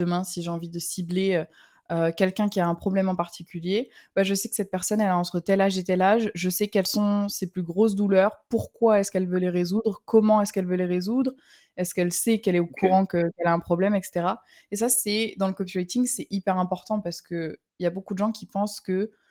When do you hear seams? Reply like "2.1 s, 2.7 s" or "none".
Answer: none